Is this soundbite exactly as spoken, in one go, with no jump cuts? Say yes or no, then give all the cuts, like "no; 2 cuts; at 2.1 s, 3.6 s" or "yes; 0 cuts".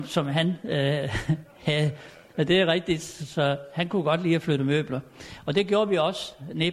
yes; 0 cuts